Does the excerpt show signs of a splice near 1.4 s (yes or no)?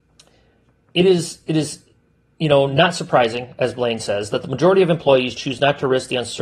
no